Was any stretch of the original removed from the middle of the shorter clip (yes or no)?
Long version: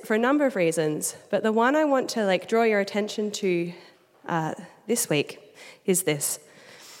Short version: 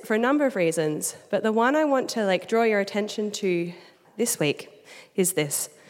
yes